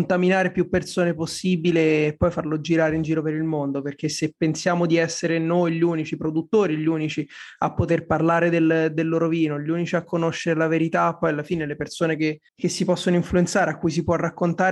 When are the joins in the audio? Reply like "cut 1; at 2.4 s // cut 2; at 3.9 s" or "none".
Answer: cut 1; at 12.5 s

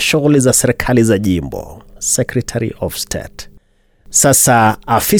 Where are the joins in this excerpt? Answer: none

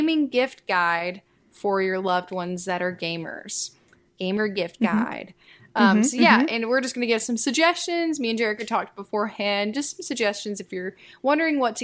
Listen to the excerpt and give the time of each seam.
none

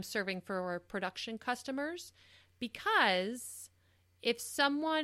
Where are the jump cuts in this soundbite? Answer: none

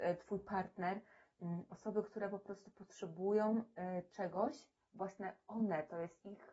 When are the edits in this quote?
none

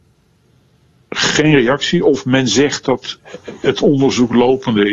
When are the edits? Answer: none

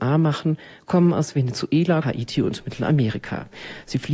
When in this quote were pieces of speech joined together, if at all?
cut 1; at 2.0 s

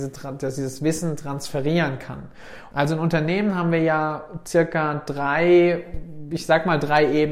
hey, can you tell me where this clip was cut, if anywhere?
cut 1; at 2.7 s

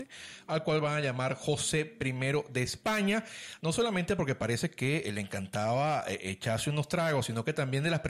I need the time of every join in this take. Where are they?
cut 1; at 3.6 s

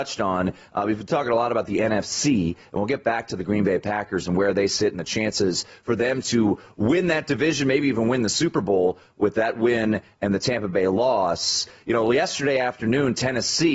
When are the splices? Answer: none

